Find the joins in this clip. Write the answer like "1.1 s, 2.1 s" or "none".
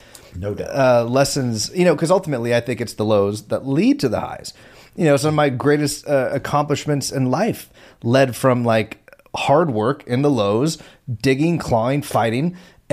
none